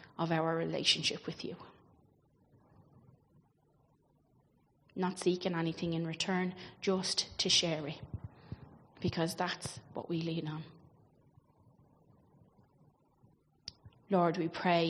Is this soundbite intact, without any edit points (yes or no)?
yes